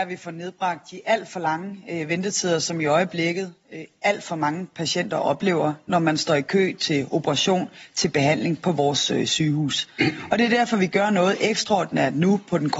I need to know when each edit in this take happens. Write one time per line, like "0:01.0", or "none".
none